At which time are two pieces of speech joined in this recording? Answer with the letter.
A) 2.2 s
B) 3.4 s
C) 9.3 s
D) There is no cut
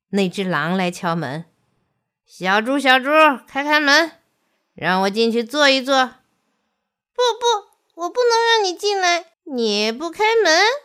C